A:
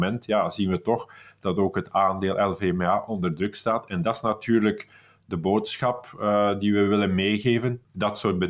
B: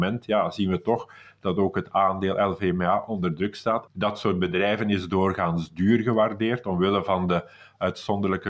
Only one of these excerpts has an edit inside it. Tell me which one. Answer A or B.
B